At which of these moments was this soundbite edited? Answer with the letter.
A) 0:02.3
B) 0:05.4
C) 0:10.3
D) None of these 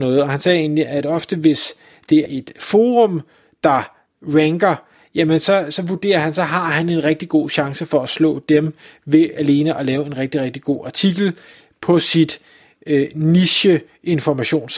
A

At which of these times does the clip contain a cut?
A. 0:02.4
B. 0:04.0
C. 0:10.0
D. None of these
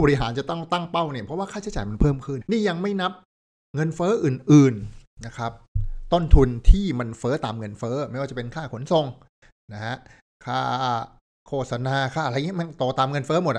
A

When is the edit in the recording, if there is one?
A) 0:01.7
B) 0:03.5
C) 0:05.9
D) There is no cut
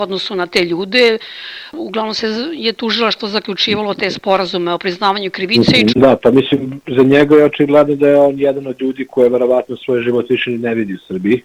C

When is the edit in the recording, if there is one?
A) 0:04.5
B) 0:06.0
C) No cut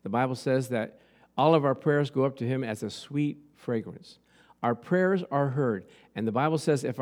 C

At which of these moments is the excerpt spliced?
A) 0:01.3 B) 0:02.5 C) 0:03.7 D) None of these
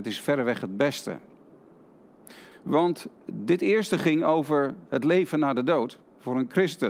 B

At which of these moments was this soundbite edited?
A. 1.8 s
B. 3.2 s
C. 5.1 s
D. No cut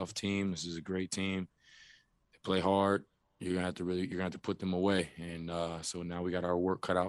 D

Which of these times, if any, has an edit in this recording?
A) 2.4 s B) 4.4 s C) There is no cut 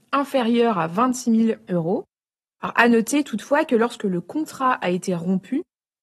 A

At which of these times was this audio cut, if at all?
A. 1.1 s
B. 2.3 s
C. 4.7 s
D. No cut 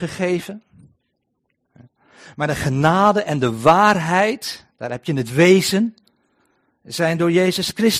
D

